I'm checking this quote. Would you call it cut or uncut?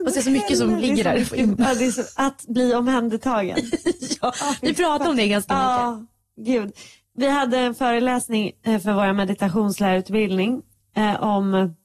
uncut